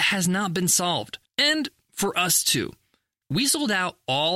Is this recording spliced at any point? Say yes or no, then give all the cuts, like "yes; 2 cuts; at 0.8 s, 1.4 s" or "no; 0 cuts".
yes; 2 cuts; at 1.2 s, 3.2 s